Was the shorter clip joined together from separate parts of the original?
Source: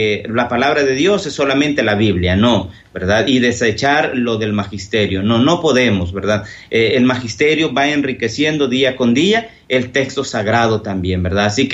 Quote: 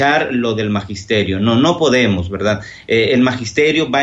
no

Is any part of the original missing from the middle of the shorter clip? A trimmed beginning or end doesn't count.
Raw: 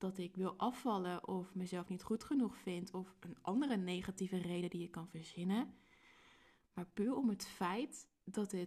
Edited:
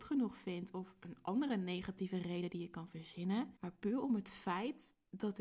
yes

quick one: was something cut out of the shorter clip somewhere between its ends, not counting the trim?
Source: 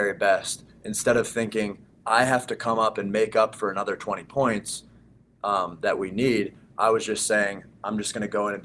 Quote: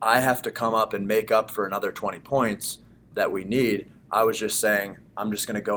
yes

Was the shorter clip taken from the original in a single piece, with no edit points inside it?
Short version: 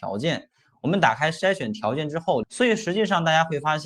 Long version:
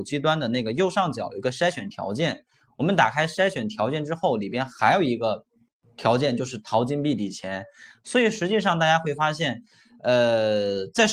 no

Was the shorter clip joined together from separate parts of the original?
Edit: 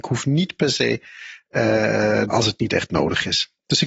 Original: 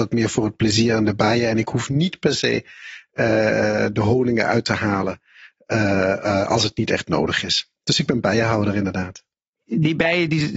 yes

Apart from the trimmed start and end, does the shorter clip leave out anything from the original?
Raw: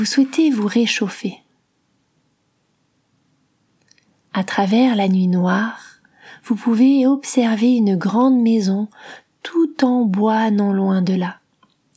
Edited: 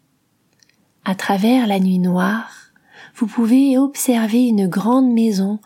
no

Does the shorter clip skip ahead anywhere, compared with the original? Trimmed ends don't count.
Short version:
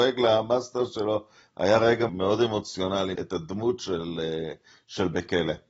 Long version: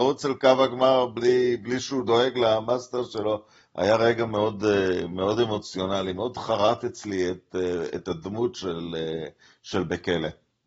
yes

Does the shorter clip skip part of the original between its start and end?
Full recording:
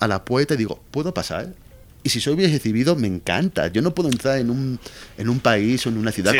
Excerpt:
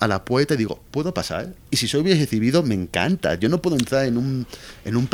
yes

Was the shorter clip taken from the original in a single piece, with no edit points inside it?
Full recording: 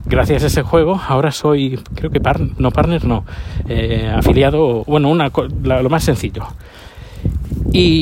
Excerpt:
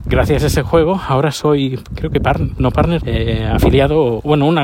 no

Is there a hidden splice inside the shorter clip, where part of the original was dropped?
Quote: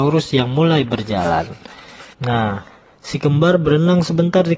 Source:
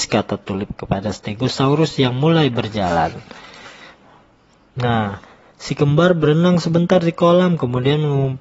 yes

